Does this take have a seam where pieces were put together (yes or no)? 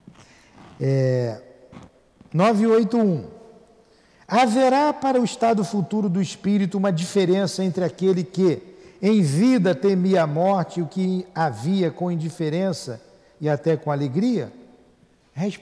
no